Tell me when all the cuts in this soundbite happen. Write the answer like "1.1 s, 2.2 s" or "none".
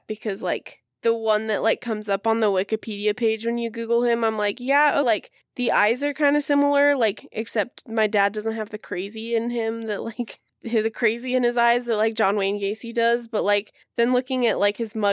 5.0 s